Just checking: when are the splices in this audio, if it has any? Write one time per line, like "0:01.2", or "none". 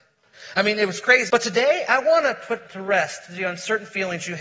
0:01.3

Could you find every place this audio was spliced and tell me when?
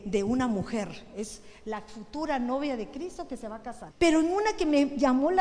0:03.9

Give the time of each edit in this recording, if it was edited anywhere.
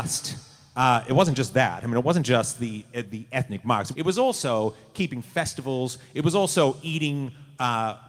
0:03.9

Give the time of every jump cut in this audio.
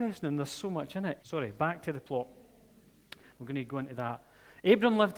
0:01.2
0:03.3

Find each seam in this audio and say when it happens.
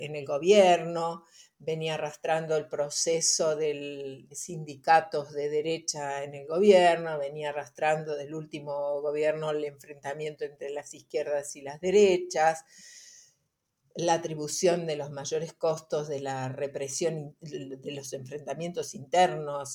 0:04.3

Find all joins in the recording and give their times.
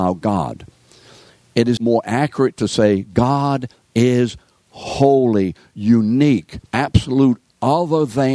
0:01.8
0:06.7

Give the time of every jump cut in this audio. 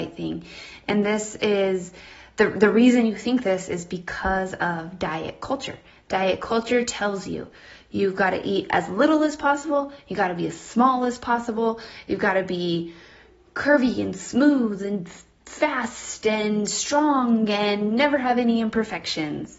none

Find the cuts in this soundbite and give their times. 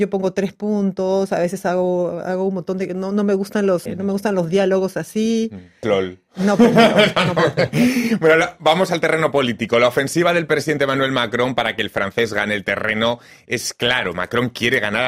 0:03.9
0:05.8

